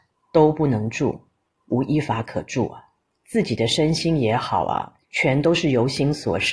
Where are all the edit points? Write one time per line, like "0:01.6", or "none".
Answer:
0:03.1
0:05.0